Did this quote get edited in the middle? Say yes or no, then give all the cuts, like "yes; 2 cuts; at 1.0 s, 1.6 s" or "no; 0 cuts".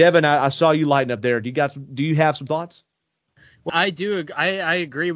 yes; 1 cut; at 3.7 s